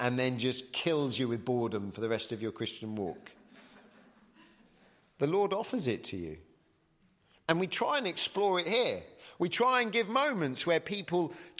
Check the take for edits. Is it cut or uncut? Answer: uncut